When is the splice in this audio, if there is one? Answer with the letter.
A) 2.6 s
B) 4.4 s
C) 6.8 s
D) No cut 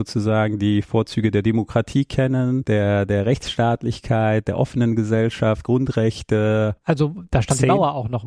C